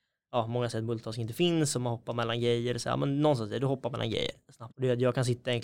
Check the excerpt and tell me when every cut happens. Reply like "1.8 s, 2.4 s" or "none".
4.7 s